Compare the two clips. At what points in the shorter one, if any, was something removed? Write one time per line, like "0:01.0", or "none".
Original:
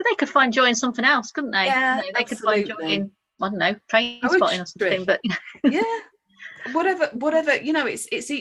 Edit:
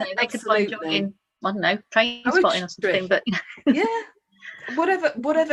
none